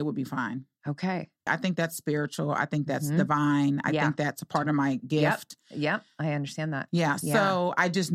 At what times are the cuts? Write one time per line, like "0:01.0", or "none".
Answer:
0:01.5